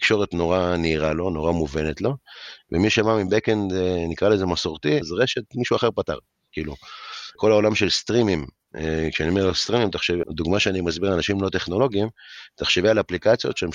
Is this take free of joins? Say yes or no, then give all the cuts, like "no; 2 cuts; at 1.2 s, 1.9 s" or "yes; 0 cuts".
no; 3 cuts; at 5.0 s, 7.4 s, 10.2 s